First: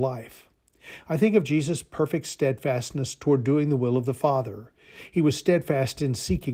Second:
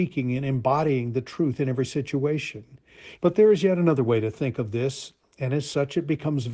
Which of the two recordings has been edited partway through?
second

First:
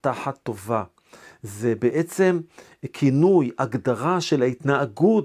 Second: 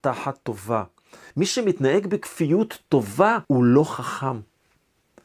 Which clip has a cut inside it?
second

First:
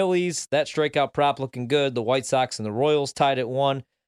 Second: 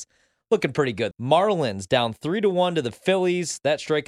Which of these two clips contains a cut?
second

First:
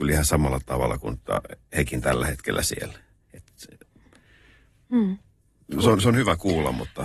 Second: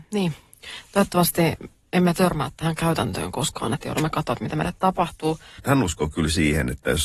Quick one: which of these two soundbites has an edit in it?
second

